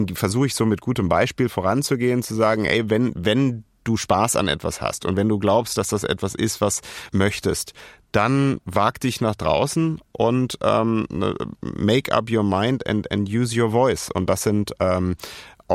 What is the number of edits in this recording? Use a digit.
1